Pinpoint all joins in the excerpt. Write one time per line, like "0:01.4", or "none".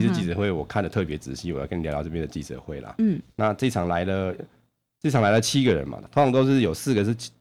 none